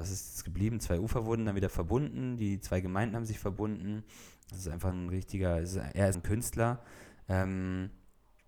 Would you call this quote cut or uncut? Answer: cut